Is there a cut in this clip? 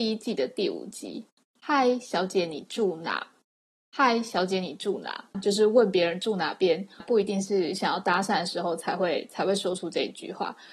yes; 2 cuts; at 5.3 s, 7.0 s

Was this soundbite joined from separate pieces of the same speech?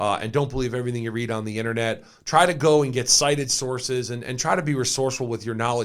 no; 0 cuts

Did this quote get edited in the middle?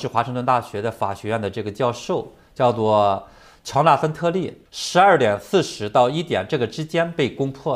yes; 1 cut; at 4.7 s

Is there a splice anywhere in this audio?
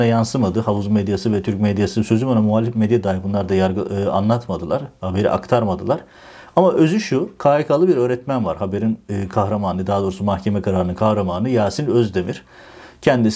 no; 0 cuts

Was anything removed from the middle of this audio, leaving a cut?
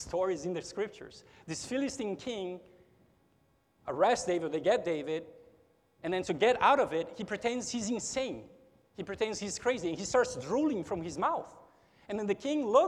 no; 0 cuts

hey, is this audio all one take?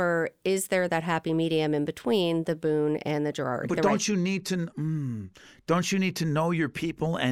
no; 1 cut; at 3.7 s

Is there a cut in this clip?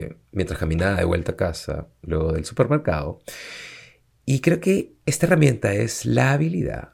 no; 0 cuts

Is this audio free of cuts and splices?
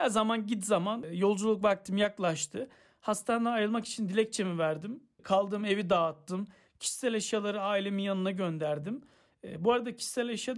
yes; 0 cuts

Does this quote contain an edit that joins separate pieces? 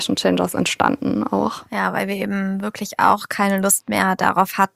no; 0 cuts

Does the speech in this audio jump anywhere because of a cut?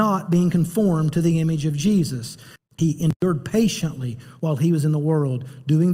yes; 1 cut; at 2.6 s

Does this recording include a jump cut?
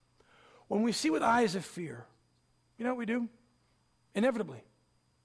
no; 0 cuts

